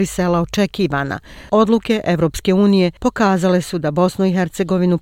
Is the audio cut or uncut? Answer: cut